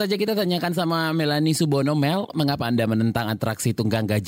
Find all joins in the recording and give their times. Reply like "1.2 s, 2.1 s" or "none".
none